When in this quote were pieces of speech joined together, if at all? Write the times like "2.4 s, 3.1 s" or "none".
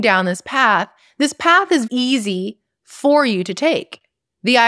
1.9 s